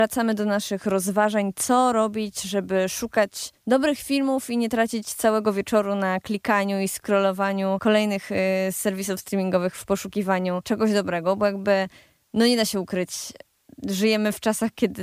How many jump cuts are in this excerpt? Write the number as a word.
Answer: zero